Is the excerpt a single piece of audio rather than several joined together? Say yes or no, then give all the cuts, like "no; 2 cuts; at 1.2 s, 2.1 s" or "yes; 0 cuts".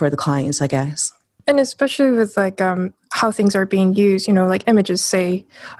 no; 1 cut; at 1.4 s